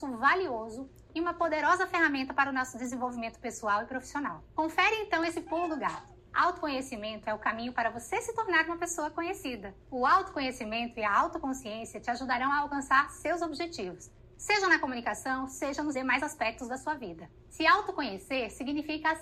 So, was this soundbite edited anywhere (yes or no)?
no